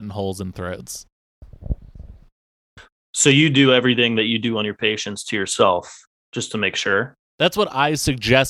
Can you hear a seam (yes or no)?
no